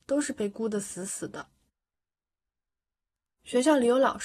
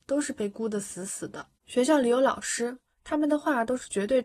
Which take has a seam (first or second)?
second